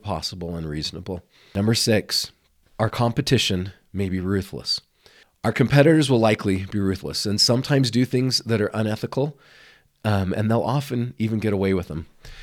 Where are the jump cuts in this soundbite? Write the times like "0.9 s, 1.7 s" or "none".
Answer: none